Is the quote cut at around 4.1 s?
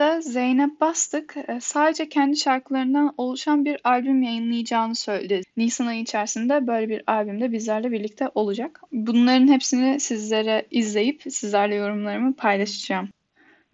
no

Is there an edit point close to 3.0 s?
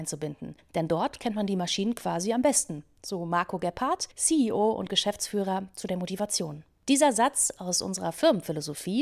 no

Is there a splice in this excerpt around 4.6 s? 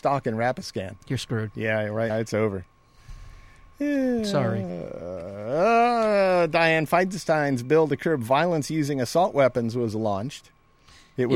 no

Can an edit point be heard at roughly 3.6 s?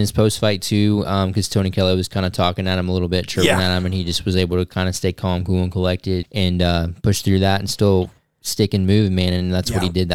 no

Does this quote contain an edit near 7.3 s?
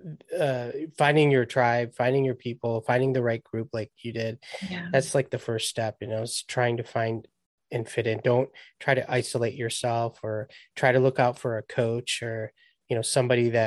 no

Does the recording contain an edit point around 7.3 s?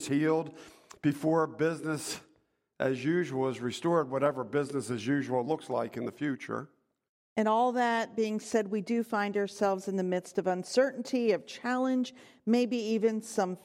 yes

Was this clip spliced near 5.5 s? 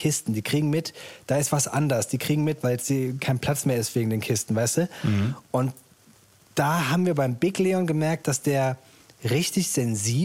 no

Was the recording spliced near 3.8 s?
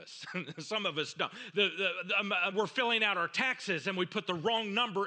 no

